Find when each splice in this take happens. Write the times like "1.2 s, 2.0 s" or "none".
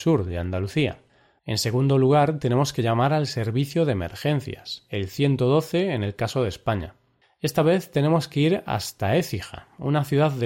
1.4 s, 7.2 s